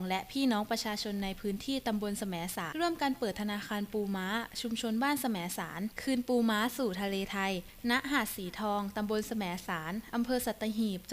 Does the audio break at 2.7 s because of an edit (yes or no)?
yes